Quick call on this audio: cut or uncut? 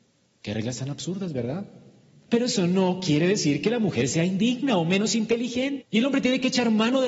cut